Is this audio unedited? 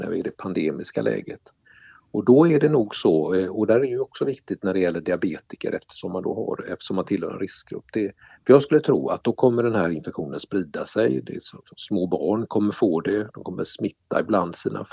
yes; 0 cuts

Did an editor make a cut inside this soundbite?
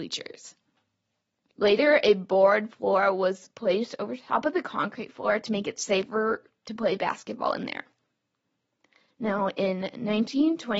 yes; 1 cut; at 1.5 s

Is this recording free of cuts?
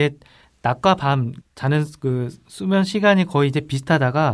no; 1 cut; at 1.4 s

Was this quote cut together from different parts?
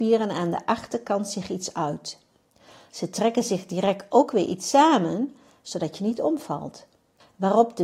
no; 0 cuts

